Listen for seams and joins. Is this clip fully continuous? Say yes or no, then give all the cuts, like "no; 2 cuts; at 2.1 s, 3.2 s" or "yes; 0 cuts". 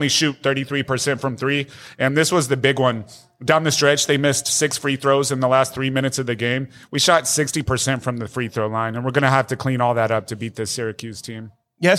yes; 0 cuts